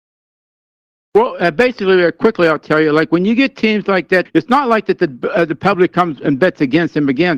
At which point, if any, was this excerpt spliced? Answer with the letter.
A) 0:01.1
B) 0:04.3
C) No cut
B